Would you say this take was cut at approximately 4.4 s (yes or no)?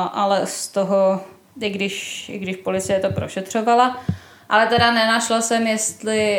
no